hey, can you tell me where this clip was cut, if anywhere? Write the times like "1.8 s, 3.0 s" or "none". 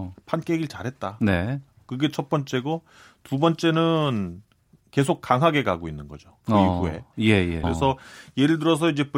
7.6 s